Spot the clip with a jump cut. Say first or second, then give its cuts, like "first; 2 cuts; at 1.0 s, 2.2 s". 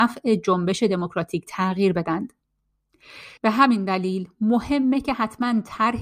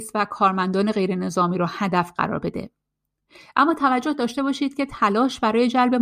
first; 1 cut; at 3.4 s